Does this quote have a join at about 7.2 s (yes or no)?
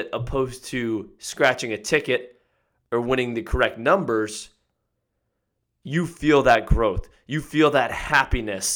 no